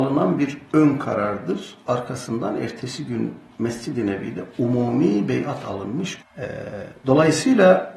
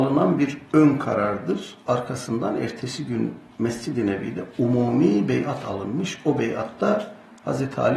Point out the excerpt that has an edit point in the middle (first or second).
first